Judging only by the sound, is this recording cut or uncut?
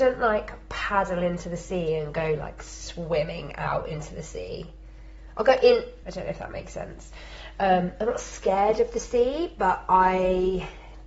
cut